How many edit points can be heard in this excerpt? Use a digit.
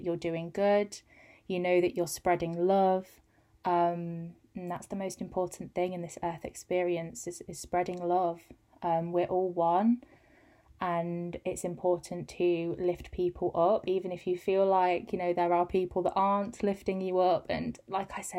0